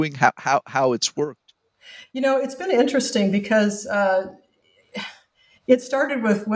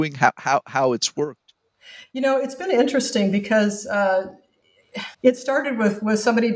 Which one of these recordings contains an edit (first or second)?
second